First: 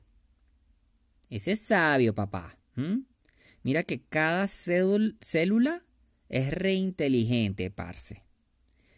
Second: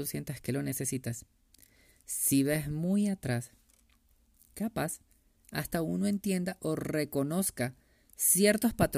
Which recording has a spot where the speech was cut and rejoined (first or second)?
first